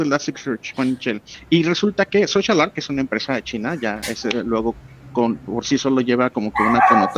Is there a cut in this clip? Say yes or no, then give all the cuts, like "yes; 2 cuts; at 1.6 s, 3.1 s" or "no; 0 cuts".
yes; 1 cut; at 1.3 s